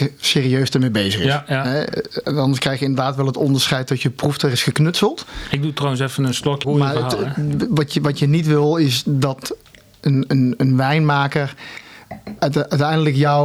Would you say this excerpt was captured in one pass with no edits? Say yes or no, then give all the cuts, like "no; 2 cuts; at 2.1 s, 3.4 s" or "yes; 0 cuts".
no; 2 cuts; at 6.6 s, 12.4 s